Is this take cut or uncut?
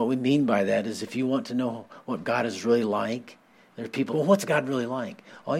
cut